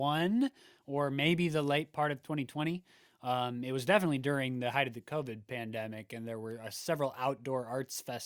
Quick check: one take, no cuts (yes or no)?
yes